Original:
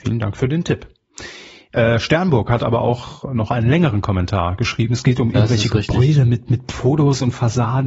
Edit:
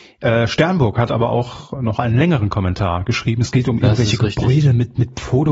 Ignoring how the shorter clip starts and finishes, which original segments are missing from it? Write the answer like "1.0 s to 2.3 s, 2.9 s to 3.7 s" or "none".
none